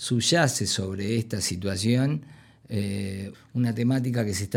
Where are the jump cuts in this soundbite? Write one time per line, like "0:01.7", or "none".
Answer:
0:03.3